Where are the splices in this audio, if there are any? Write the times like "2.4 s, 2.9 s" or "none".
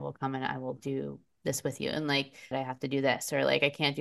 2.5 s